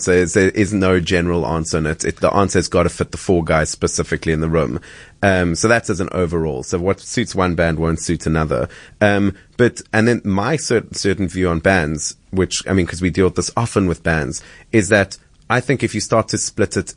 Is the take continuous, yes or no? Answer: yes